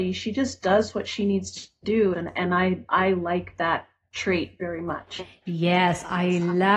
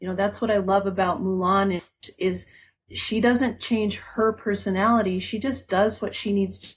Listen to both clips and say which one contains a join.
first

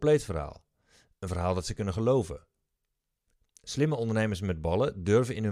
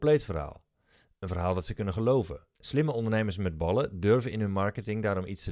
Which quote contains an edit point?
second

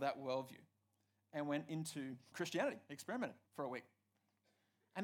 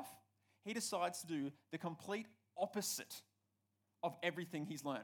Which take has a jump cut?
first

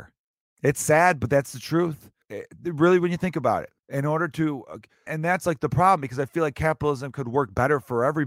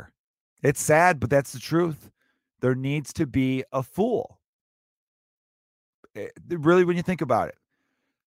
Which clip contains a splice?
first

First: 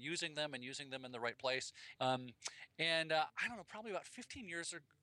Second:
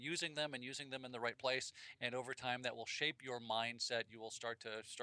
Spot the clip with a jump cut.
first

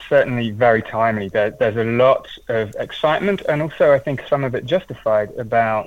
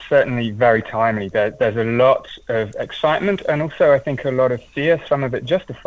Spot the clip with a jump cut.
first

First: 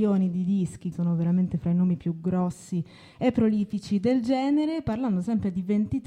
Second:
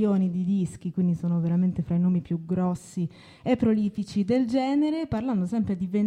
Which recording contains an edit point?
first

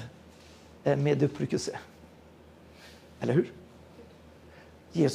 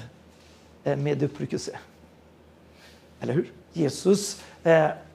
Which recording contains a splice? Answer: second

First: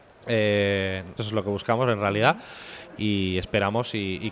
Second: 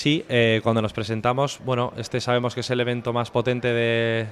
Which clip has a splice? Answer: first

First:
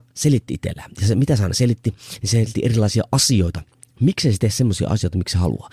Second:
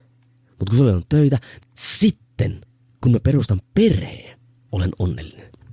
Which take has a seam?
second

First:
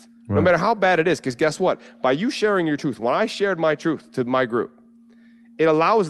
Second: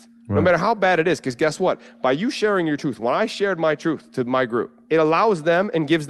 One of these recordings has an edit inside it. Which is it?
second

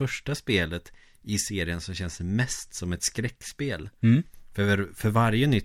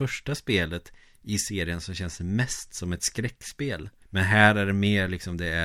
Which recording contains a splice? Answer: second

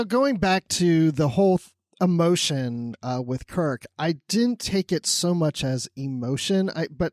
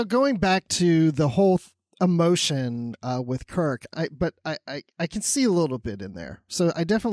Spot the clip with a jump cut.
second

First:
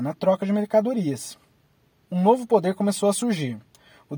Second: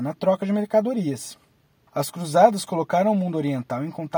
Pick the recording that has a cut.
second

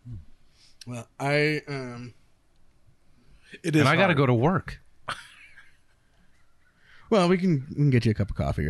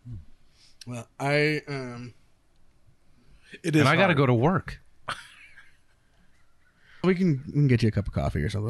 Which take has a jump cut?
second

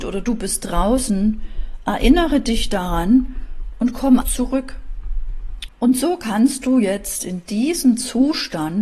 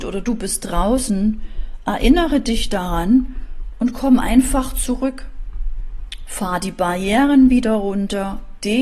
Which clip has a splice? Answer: first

